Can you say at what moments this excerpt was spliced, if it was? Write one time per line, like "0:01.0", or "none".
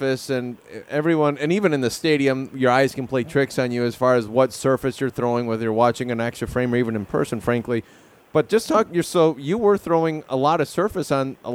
none